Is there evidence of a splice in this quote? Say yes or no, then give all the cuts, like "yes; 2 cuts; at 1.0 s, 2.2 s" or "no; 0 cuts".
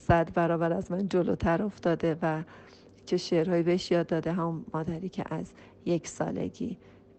no; 0 cuts